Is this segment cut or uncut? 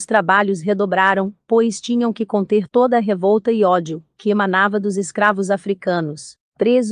uncut